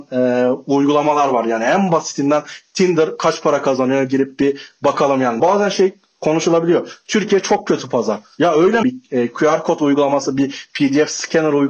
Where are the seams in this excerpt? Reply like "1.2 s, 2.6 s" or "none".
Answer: 5.4 s, 8.8 s